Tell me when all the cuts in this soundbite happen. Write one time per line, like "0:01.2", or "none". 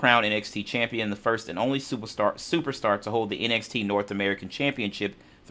none